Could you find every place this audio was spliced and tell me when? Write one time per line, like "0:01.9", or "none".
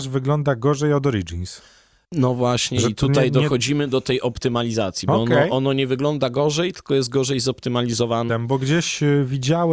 0:08.3